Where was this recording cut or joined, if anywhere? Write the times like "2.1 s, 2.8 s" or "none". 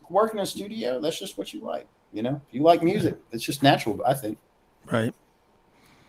none